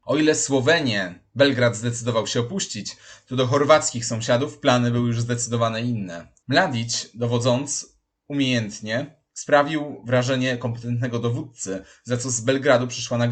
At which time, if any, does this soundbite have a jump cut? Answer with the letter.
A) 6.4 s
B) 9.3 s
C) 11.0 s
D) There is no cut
A